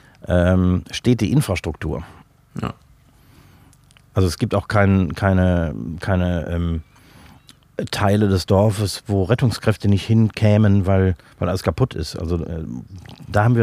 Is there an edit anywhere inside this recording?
no; 0 cuts

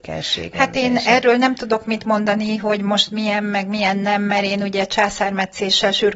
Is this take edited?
no; 0 cuts

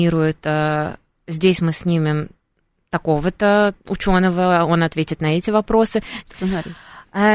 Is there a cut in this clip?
yes; 1 cut; at 6.2 s

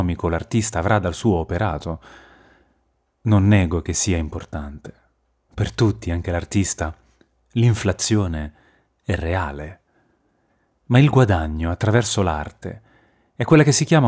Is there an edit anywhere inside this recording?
no; 0 cuts

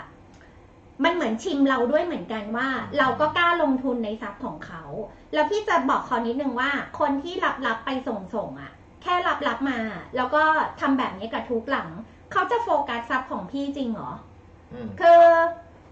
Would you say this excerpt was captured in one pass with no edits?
yes; 0 cuts

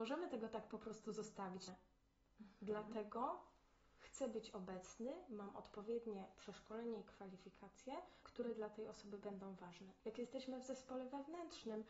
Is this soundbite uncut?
no; 3 cuts; at 1.7 s, 8.2 s, 10.0 s

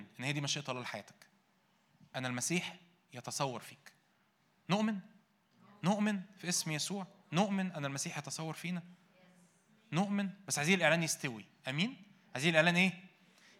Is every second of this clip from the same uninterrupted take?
yes; 0 cuts

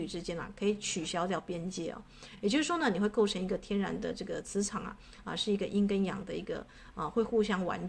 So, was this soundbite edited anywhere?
no; 0 cuts

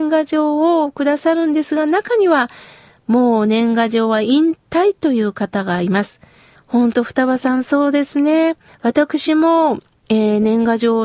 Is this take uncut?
no; 2 cuts; at 6.6 s, 8.7 s

